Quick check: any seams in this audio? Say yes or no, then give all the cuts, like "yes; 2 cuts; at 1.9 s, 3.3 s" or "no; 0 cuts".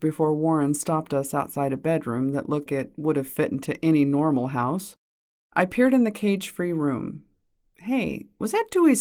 yes; 2 cuts; at 2.7 s, 5.5 s